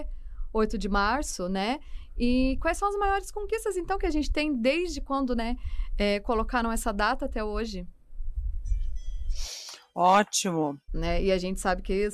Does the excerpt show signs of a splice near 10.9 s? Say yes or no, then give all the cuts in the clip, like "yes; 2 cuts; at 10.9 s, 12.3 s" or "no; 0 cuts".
yes; 1 cut; at 10.9 s